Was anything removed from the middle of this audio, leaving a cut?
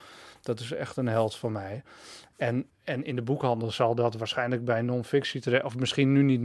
yes; 1 cut; at 2.7 s

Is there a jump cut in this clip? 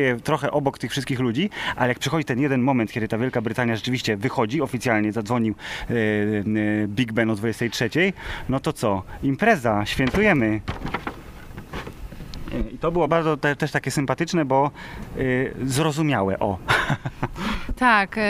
yes; 1 cut; at 13.1 s

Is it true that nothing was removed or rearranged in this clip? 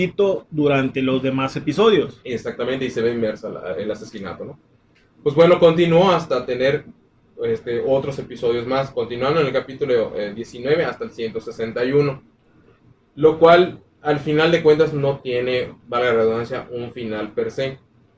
yes; 0 cuts

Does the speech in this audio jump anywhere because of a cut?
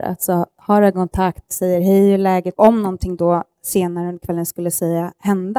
yes; 1 cut; at 2.5 s

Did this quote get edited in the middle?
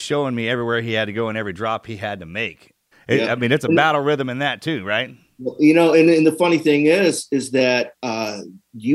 yes; 1 cut; at 2.9 s

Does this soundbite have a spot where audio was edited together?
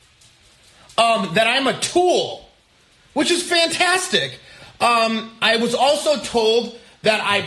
no; 0 cuts

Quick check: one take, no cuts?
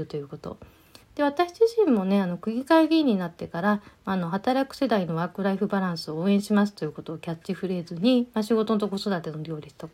no; 1 cut; at 1.0 s

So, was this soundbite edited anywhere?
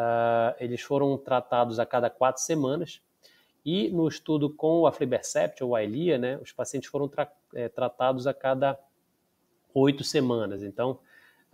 no; 0 cuts

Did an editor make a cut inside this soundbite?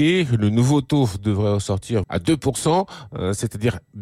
yes; 1 cut; at 2.0 s

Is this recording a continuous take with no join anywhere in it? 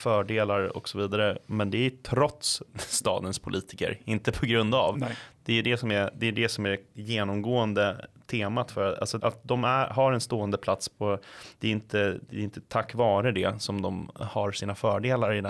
no; 2 cuts; at 9.2 s, 11.6 s

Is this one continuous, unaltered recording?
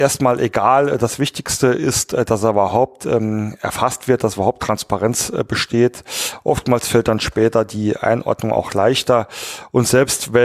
yes; 0 cuts

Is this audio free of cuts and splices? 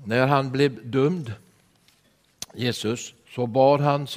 no; 1 cut; at 3.2 s

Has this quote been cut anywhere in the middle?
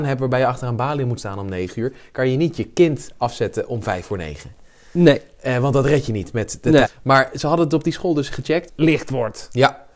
yes; 2 cuts; at 6.8 s, 8.7 s

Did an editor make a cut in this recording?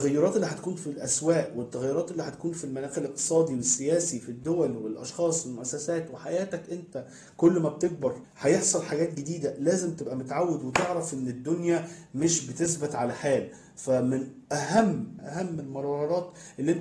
yes; 1 cut; at 15.2 s

